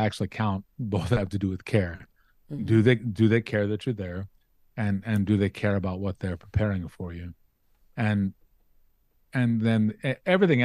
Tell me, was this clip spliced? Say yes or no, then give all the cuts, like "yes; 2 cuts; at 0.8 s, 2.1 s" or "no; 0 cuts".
no; 0 cuts